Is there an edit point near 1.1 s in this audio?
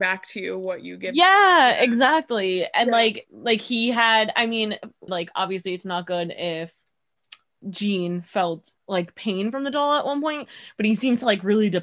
no; 3 cuts; at 5.1 s, 7.6 s, 8.8 s

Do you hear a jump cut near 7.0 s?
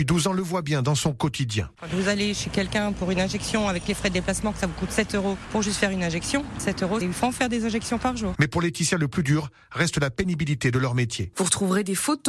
yes; 3 cuts; at 7.0 s, 8.3 s, 11.3 s

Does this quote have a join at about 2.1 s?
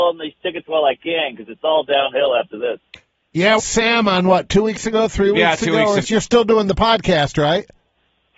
no; 2 cuts; at 3.6 s, 6.0 s

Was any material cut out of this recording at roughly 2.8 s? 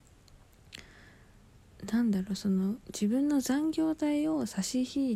yes; 1 cut; at 2.8 s

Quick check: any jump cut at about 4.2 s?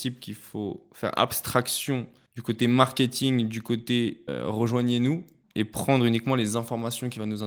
no; 0 cuts

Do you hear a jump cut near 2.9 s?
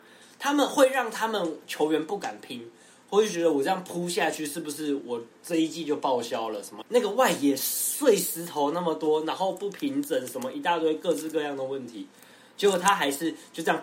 no; 1 cut; at 6.8 s

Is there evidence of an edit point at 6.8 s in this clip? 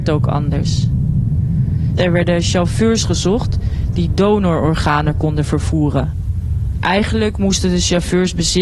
no; 1 cut; at 2.0 s

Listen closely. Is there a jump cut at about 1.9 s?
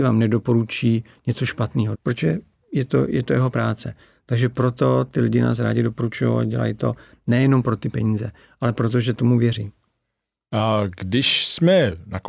yes; 1 cut; at 1.9 s

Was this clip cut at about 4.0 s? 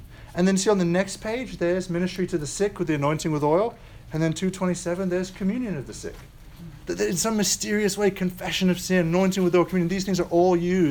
no; 1 cut; at 6.8 s

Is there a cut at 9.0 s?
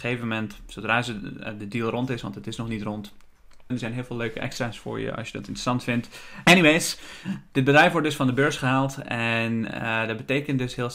no; 2 cuts; at 3.7 s, 6.4 s

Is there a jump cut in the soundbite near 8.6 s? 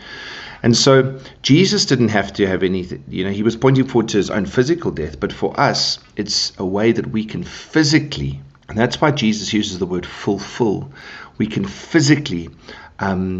yes; 1 cut; at 8.6 s

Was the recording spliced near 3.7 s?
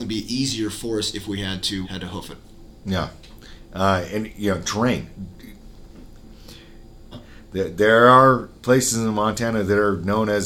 no; 2 cuts; at 1.8 s, 7.1 s

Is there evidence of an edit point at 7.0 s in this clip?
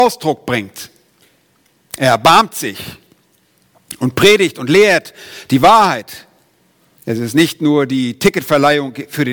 yes; 1 cut; at 7.0 s

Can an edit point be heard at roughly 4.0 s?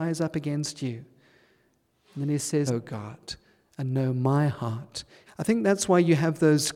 no; 2 cuts; at 2.7 s, 5.3 s

